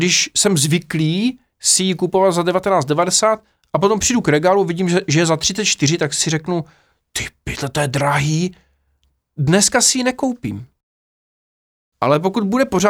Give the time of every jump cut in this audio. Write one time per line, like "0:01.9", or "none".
none